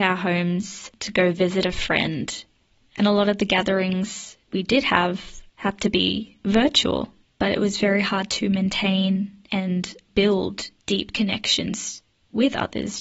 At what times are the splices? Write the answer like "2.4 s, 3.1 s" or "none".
2.8 s, 7.2 s